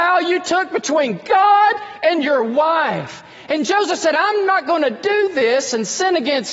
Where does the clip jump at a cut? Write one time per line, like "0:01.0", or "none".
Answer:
none